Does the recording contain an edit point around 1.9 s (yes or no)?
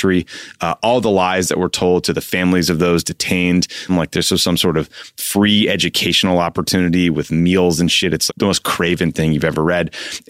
no